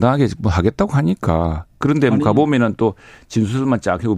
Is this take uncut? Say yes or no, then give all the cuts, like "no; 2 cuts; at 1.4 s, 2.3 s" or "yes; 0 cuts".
yes; 0 cuts